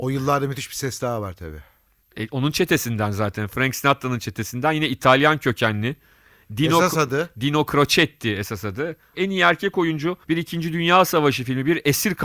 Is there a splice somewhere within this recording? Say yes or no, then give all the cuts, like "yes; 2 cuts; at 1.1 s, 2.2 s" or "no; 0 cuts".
yes; 2 cuts; at 9.1 s, 10.2 s